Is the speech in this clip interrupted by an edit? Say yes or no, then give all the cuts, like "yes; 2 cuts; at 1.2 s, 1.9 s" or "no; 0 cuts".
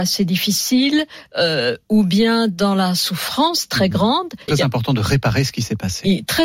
yes; 1 cut; at 4.5 s